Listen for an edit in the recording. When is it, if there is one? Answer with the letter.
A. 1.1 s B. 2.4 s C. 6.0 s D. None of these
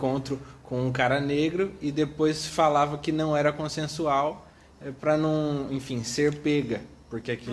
D